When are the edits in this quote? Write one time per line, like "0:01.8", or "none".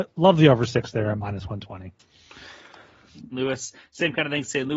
0:03.3

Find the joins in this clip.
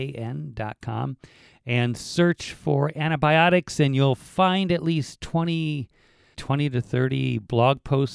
0:06.3

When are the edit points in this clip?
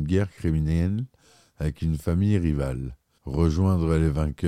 0:03.2

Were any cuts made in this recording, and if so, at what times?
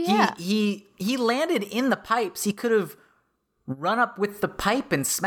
none

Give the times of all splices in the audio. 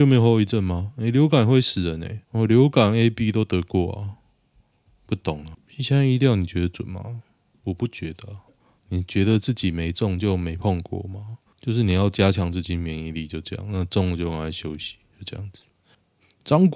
0:02.2
0:05.5
0:11.5

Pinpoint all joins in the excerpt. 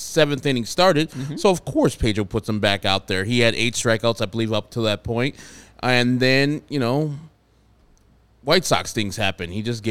none

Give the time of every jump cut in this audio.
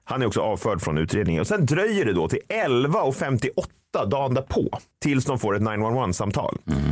none

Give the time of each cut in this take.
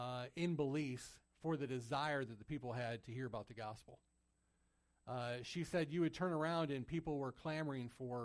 none

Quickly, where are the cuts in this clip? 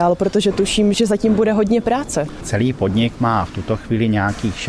none

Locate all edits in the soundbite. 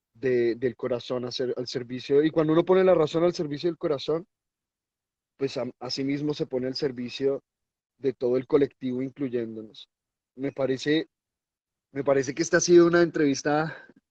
none

